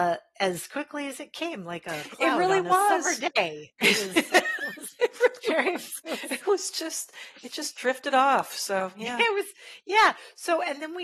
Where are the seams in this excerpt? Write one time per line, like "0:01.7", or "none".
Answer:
none